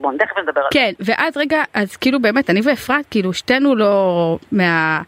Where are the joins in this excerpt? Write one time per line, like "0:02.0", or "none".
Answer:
none